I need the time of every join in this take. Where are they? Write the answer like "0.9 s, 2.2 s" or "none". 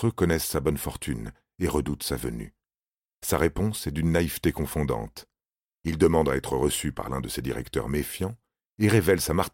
none